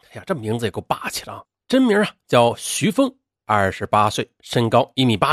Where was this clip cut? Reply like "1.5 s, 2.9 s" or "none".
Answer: 1.6 s